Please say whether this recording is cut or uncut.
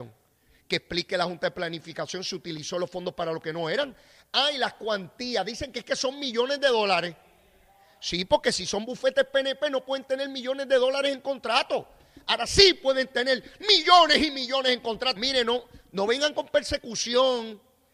cut